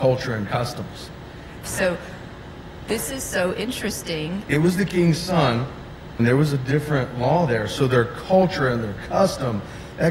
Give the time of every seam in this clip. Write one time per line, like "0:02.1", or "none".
0:01.6
0:04.5
0:06.2